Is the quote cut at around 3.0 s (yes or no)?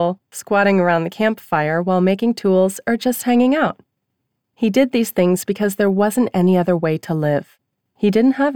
no